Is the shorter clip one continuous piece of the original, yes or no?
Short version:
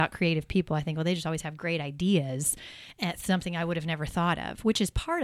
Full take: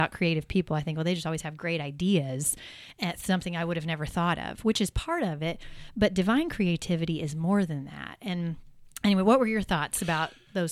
yes